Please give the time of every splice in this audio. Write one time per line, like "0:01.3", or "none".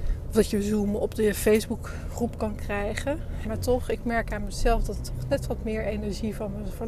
0:03.4